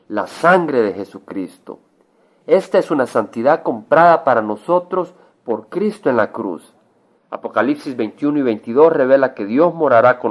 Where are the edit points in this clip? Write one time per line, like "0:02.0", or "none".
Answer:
0:07.2